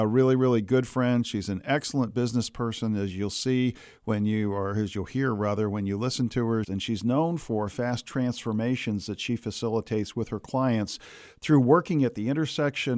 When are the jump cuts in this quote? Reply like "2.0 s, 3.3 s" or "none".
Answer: 6.6 s